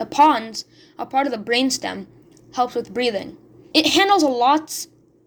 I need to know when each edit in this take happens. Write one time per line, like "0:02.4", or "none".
0:03.7